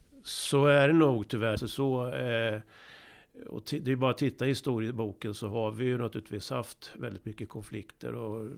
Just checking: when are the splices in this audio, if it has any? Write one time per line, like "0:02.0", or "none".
0:01.6